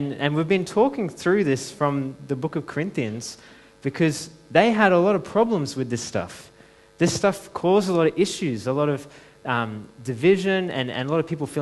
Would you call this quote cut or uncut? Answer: uncut